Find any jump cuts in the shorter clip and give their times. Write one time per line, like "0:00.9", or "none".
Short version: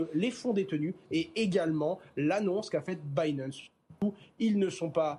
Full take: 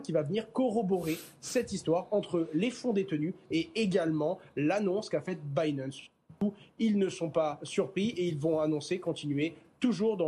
none